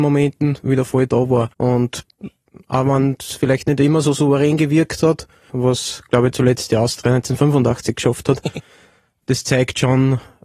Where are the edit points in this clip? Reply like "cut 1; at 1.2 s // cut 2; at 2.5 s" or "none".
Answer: cut 1; at 1.5 s // cut 2; at 5.5 s // cut 3; at 9.2 s